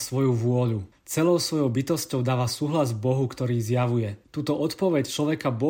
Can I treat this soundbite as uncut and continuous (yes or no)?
yes